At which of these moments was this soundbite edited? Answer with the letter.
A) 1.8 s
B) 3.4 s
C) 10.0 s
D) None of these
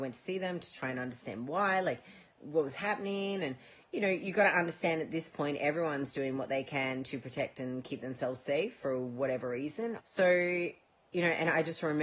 C